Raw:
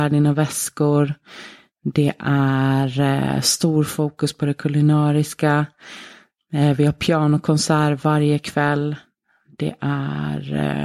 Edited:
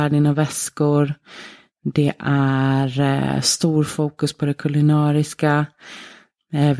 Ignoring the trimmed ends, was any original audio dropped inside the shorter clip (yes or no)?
no